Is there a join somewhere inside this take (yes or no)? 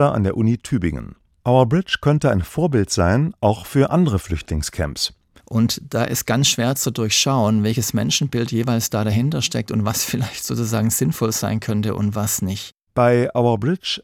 yes